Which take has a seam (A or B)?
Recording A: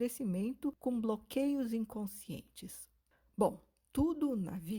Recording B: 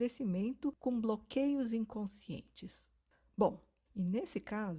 B